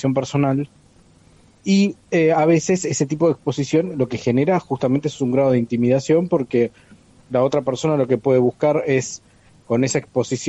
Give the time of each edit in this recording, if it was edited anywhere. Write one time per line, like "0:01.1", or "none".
none